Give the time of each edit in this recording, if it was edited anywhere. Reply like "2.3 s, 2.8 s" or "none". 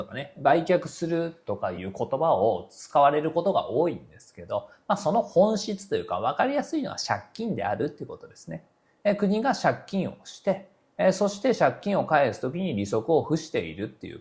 none